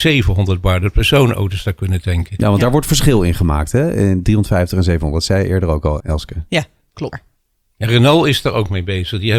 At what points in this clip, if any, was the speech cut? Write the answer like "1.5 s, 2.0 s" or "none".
6.0 s, 7.1 s

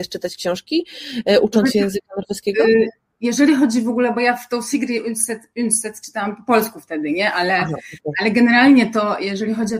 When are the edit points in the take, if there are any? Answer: none

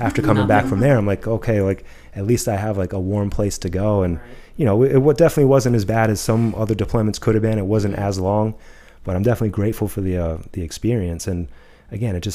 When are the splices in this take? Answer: none

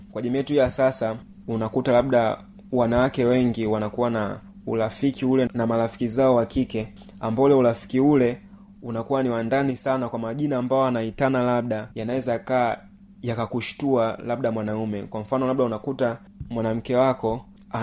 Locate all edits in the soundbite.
5.5 s, 11.9 s

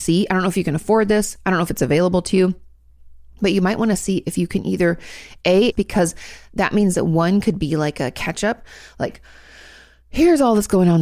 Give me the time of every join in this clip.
5.7 s

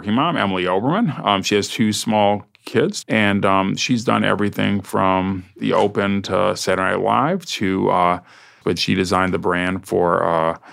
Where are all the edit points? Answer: 3.0 s, 8.6 s

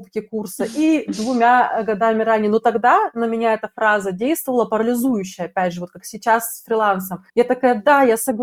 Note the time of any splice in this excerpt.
7.3 s

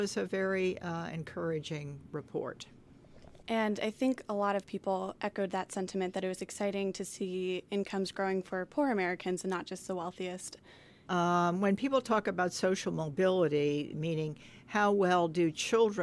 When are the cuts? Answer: 11.1 s, 13.9 s

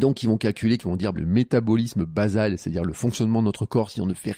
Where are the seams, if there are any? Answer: 1.1 s

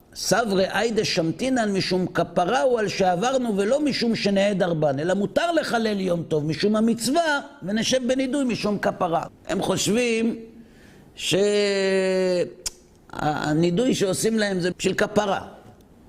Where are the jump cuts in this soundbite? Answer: 9.3 s, 14.7 s

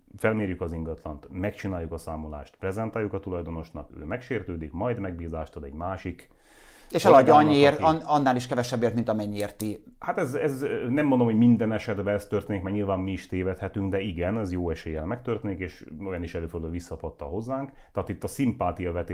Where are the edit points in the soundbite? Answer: none

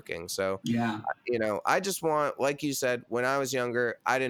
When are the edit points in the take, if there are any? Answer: none

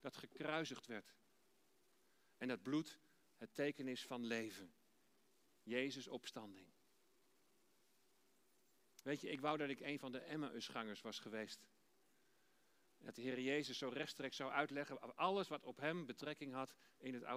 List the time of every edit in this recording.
9.0 s

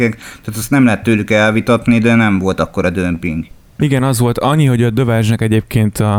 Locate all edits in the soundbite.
3.8 s

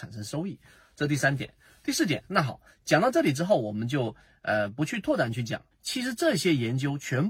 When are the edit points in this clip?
5.7 s

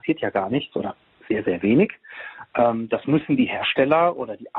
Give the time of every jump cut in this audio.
none

